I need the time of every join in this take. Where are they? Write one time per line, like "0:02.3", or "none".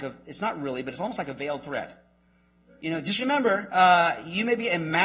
none

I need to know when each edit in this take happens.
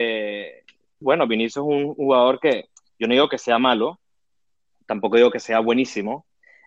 0:01.0

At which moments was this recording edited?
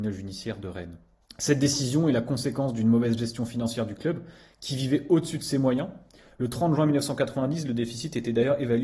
none

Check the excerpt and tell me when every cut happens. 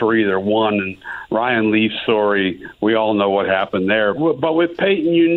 0:02.0
0:04.2

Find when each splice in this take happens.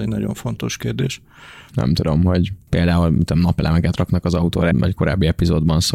0:01.7
0:04.7

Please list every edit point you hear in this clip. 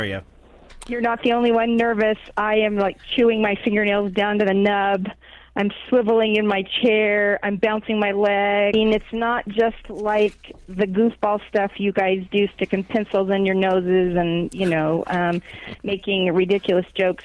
0:08.7

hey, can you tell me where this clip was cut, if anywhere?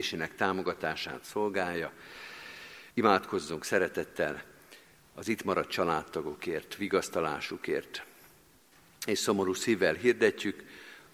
0:02.9

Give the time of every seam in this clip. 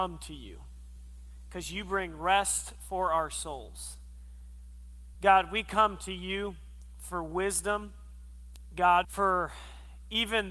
0:05.1
0:09.0

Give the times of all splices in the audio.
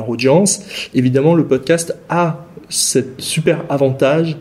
0:00.9
0:03.2

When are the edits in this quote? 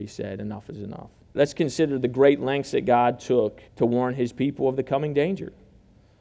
0:01.4
0:03.7

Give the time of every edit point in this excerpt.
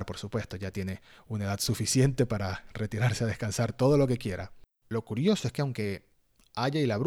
0:04.8

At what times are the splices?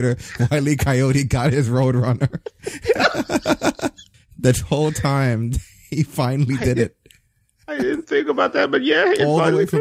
none

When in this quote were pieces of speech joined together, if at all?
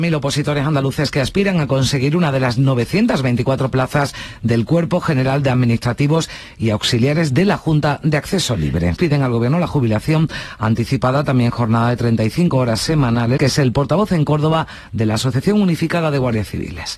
0:09.0
0:13.4

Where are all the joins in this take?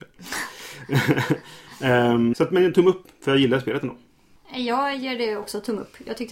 0:02.3

